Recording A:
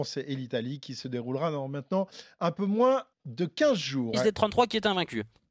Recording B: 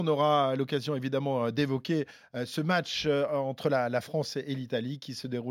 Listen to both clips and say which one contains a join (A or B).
A